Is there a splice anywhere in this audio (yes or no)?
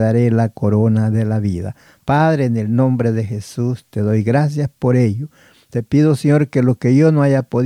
no